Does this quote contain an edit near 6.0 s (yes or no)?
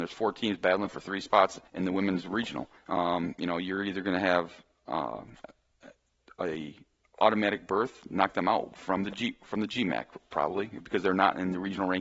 no